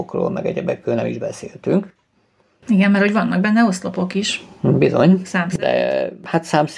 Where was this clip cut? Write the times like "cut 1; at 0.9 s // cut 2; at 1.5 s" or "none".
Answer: none